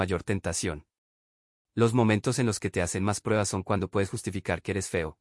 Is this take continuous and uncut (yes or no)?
yes